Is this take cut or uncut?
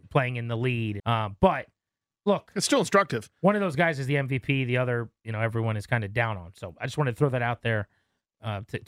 cut